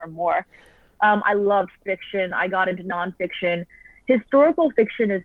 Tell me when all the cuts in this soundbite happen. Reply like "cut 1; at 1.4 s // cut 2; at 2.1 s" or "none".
none